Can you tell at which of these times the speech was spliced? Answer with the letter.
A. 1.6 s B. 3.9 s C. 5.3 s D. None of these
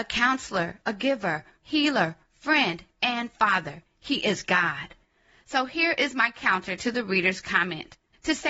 A